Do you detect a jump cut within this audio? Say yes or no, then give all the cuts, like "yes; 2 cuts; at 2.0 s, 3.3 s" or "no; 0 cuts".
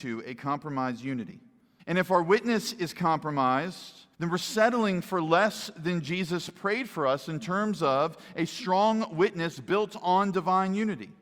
yes; 2 cuts; at 1.8 s, 4.1 s